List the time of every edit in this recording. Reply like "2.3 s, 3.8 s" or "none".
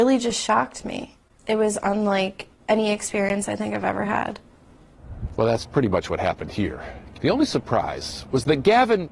5.4 s, 7.1 s